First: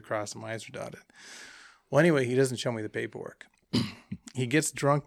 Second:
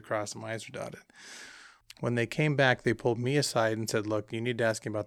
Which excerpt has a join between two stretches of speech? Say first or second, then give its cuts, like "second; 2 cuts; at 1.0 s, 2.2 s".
second; 1 cut; at 1.8 s